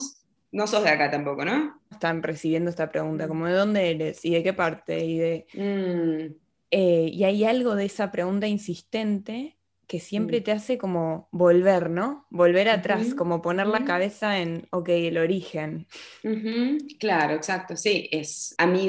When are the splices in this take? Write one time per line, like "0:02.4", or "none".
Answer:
0:01.9

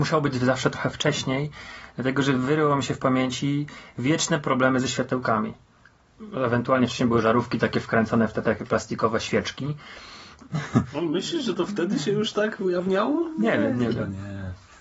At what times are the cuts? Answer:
0:10.5

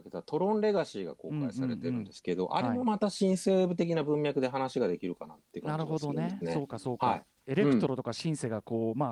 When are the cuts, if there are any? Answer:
none

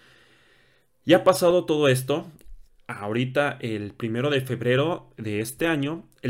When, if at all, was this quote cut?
none

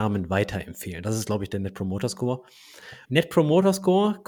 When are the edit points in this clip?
0:03.0

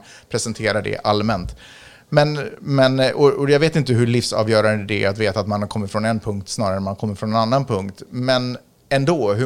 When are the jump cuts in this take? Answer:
none

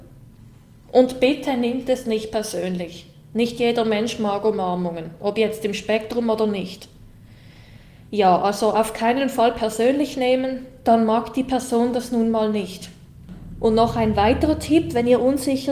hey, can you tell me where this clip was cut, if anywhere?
none

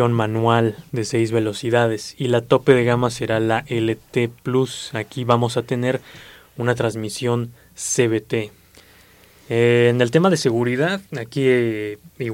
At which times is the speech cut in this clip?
0:11.1

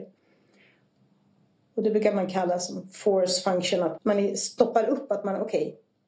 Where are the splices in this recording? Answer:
0:04.0

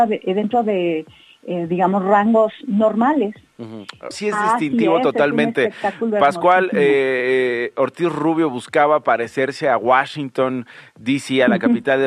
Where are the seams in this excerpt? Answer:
0:04.1

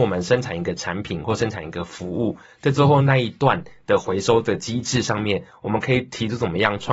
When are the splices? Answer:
none

